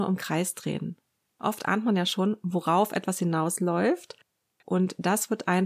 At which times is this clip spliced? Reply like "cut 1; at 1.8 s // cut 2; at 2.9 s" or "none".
cut 1; at 1.3 s // cut 2; at 4.6 s